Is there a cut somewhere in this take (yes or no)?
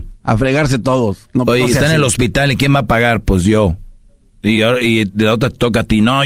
no